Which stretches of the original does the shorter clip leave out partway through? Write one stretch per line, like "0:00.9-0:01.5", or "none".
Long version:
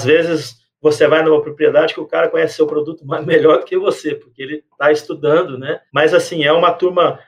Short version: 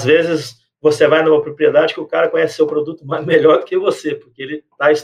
none